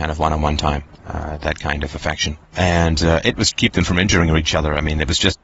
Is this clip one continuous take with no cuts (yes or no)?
no